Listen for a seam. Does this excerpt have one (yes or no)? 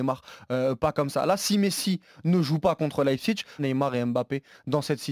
yes